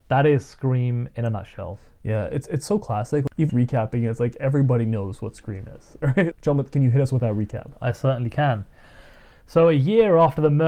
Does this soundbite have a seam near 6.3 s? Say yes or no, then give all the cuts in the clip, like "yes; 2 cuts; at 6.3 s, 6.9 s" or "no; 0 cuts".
yes; 2 cuts; at 3.5 s, 6.3 s